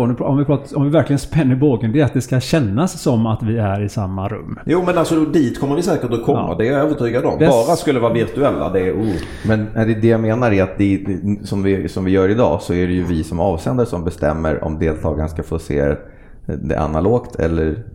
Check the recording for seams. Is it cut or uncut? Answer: cut